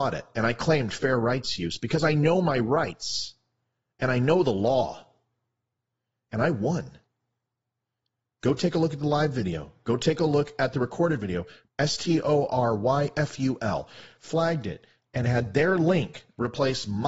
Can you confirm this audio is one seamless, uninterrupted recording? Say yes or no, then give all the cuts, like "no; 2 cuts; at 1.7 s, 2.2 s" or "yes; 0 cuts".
no; 1 cut; at 11.7 s